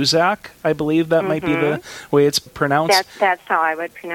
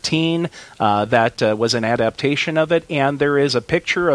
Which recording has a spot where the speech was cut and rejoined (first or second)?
first